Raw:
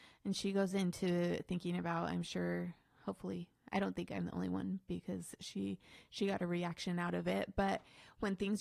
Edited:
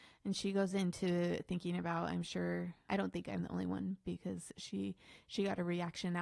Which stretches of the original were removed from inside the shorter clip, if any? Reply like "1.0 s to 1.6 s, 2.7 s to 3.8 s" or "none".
2.9 s to 3.7 s